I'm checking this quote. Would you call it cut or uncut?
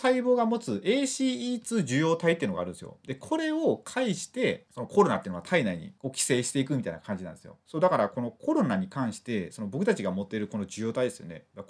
uncut